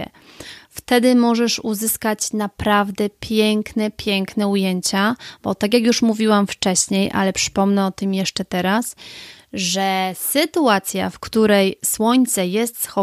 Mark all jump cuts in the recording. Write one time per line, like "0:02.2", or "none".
none